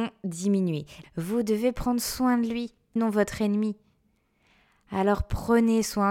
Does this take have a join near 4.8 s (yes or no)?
no